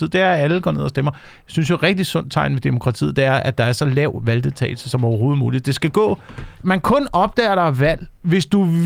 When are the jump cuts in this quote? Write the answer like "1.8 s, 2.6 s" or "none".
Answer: 6.6 s